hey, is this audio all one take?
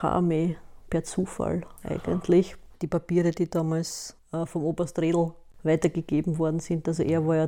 yes; 0 cuts

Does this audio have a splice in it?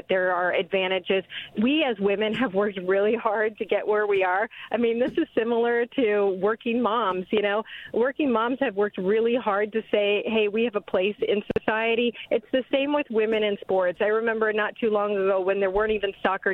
no; 0 cuts

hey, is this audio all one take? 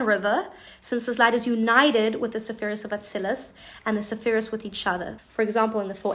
no; 1 cut; at 5.2 s

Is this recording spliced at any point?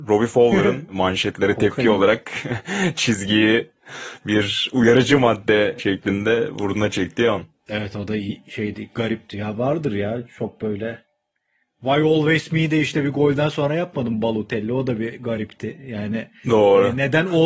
no; 0 cuts

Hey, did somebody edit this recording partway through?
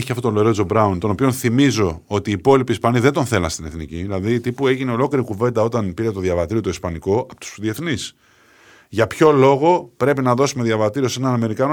no; 0 cuts

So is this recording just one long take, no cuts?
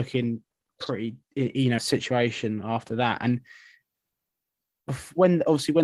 no; 1 cut; at 1.8 s

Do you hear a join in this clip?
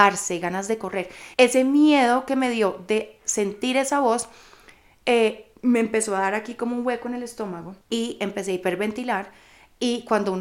yes; 2 cuts; at 1.3 s, 7.8 s

